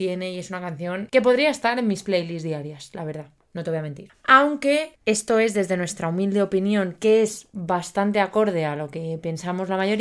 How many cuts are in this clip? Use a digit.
0